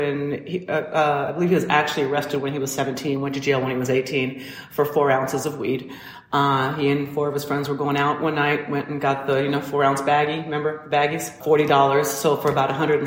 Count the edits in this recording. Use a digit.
0